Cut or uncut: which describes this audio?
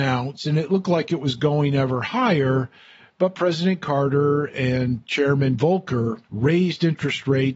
uncut